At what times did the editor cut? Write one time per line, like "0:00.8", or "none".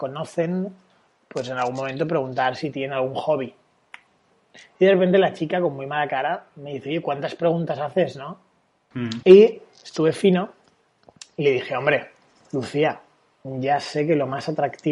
0:08.9

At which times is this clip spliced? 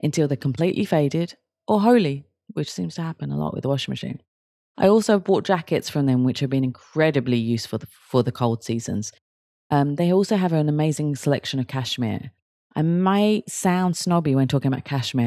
none

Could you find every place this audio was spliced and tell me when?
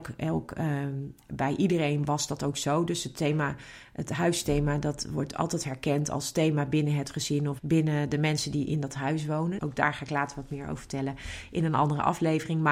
0:07.6
0:09.6

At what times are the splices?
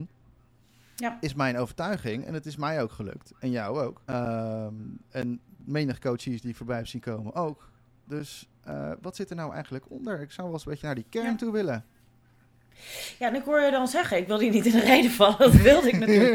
0:04.0

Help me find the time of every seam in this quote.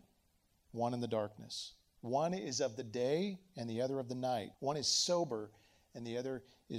0:04.5

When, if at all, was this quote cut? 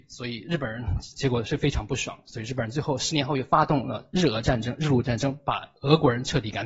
none

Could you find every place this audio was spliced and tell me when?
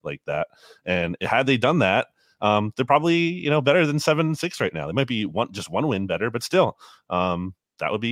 none

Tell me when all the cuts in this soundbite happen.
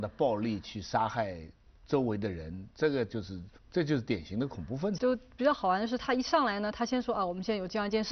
0:03.6
0:05.0

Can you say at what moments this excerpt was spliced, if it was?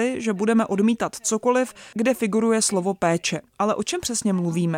0:03.5

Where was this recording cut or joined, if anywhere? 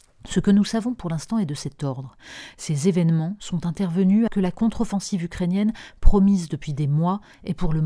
0:04.3

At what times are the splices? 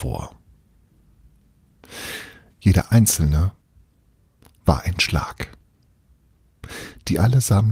0:02.5

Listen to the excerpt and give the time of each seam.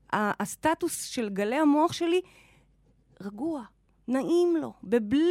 none

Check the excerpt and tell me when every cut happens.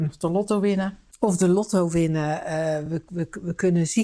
none

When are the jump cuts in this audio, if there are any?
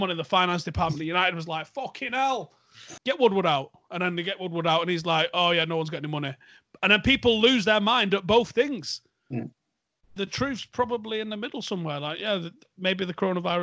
0:03.0

